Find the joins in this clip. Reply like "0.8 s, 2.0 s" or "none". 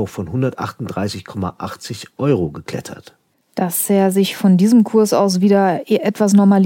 none

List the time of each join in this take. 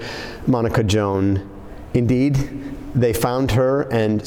1.9 s

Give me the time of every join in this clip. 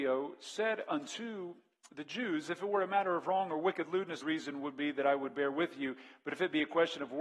4.2 s

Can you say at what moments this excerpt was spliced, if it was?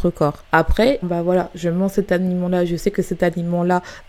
1.0 s

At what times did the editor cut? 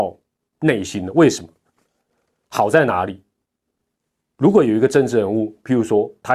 none

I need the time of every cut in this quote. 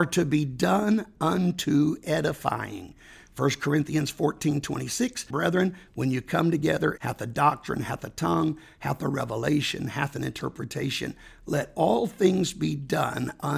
5.3 s, 7.0 s

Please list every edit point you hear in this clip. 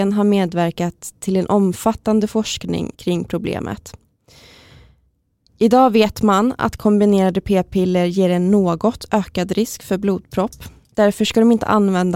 2.9 s

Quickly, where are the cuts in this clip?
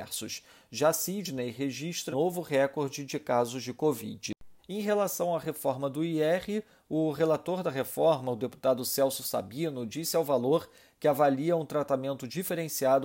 2.1 s, 4.6 s

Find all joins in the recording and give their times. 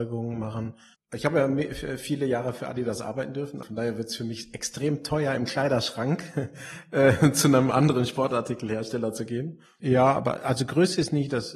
0.9 s, 3.6 s, 9.8 s

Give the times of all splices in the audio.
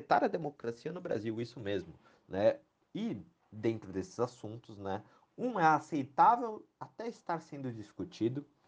none

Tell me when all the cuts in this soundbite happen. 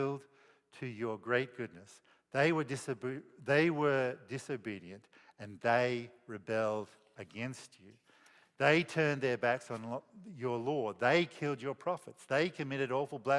none

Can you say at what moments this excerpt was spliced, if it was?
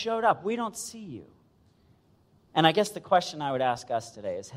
none

